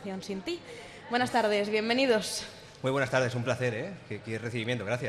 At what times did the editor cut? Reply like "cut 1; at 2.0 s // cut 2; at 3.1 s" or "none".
none